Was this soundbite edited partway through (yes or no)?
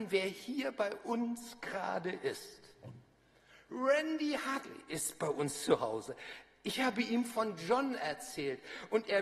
no